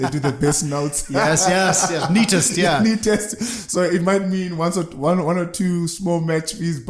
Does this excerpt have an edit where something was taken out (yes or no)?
no